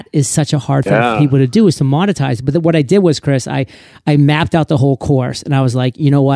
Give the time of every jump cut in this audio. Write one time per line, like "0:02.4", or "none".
none